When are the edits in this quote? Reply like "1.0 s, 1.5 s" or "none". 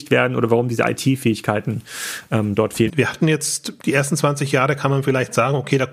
2.9 s